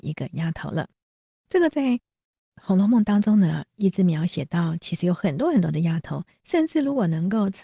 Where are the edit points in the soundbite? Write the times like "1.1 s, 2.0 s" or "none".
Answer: 6.4 s